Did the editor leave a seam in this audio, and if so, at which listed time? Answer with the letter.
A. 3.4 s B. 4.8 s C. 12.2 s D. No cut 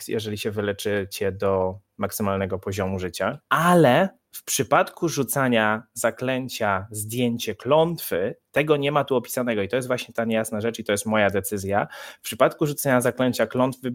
A